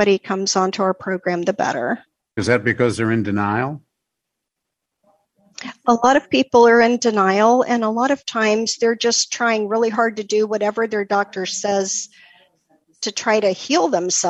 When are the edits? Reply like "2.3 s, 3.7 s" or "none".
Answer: 2.4 s